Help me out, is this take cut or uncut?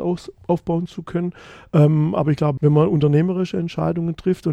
cut